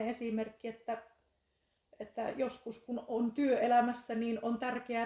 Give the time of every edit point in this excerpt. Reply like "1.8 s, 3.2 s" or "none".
none